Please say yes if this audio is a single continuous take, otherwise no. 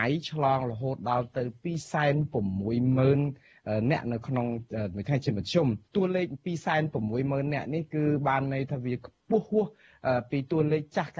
no